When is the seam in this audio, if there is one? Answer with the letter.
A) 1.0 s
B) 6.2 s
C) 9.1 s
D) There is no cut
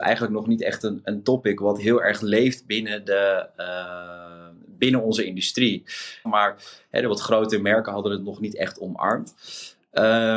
B